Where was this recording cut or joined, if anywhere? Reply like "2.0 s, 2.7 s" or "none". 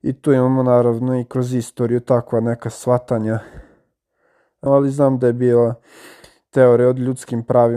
4.7 s